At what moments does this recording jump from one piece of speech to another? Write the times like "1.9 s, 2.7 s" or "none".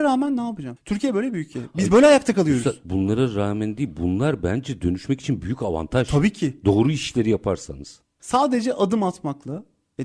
none